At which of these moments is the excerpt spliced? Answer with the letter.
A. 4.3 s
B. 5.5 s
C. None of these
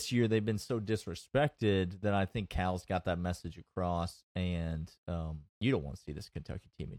B